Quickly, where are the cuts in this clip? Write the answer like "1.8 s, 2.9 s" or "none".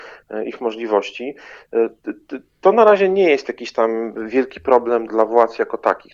5.1 s